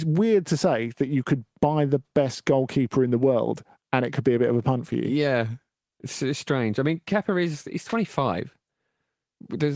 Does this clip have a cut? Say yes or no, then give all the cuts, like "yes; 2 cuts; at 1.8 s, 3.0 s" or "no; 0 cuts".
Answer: no; 0 cuts